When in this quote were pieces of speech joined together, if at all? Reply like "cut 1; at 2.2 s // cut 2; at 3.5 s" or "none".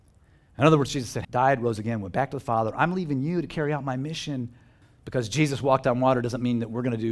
cut 1; at 1.2 s // cut 2; at 4.8 s